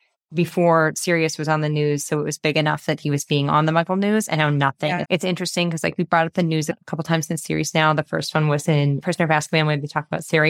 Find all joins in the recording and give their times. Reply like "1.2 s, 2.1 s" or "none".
5.0 s